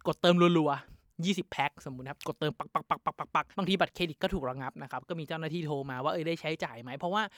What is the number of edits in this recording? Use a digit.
1